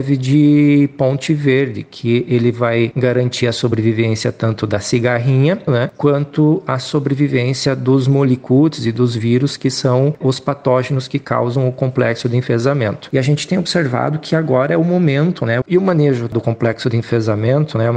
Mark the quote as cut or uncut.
cut